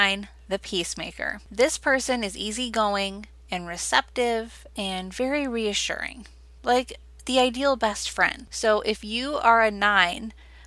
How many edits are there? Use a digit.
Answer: 1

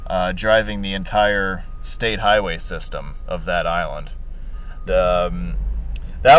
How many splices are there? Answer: 1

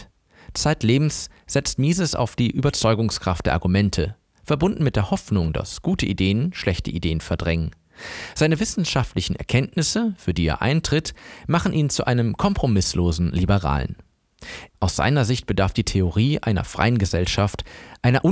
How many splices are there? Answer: 1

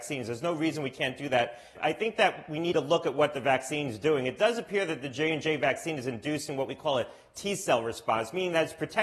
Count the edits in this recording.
1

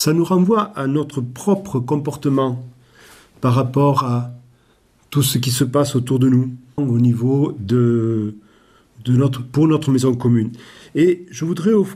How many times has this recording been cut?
1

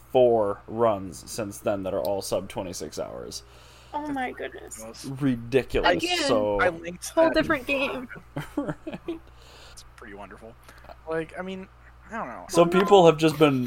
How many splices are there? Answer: 3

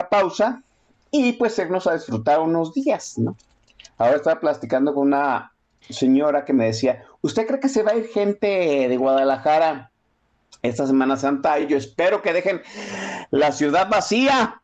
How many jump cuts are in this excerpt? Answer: 0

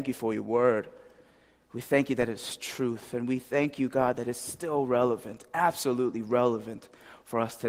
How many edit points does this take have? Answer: 0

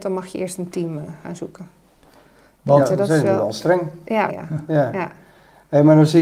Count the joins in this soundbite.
1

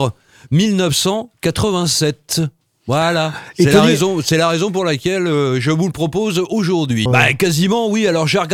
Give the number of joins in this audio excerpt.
1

